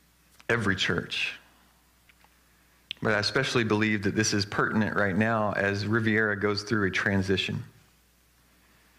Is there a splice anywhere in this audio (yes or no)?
no